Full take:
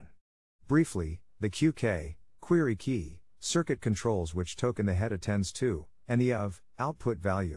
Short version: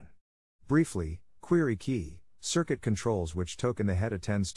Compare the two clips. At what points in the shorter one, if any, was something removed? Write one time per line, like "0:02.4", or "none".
0:01.4

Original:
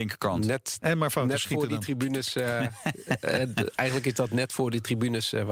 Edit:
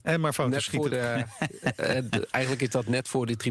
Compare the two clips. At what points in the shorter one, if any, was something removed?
0:00.9

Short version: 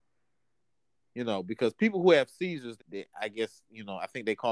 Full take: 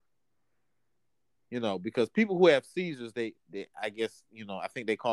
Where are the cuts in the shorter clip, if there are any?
0:02.8

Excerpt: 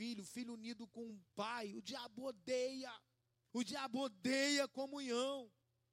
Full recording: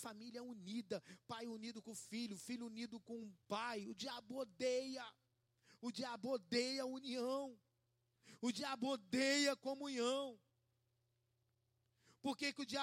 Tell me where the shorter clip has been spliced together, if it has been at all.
0:03.5

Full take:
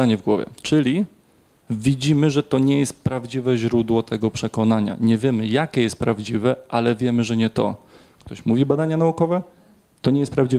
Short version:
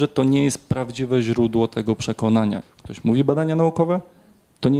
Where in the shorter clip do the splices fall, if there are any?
0:02.6

